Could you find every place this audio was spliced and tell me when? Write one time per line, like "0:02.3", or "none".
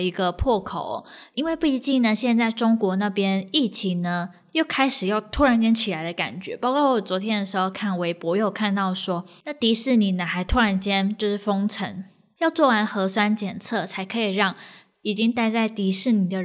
0:09.4